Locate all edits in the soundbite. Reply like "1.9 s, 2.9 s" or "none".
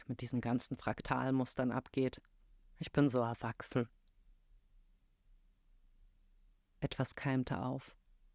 2.6 s

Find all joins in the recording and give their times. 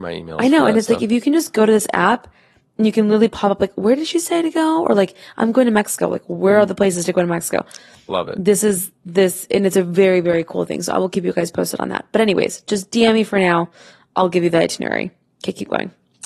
none

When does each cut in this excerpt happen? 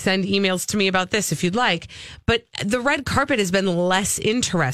none

